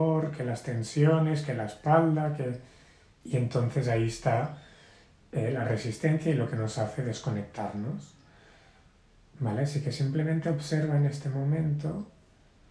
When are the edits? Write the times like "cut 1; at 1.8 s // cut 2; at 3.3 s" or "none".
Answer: cut 1; at 3.2 s